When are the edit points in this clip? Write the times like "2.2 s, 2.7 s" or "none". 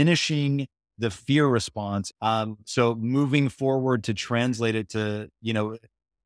2.1 s